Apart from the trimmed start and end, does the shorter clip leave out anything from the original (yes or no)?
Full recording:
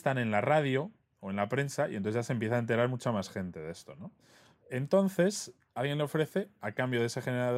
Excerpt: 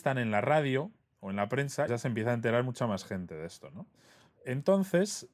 yes